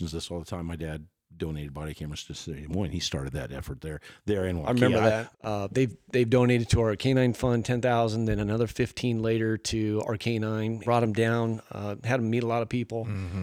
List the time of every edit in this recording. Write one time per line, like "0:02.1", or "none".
0:05.3
0:10.8